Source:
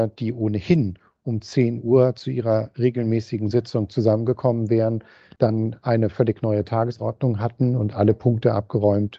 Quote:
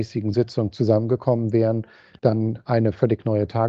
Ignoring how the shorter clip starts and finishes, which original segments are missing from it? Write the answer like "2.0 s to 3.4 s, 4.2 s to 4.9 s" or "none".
none